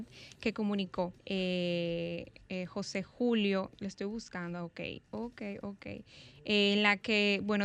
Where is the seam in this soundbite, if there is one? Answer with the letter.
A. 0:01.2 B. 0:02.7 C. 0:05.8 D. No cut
A